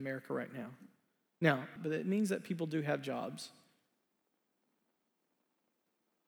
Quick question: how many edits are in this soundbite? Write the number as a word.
one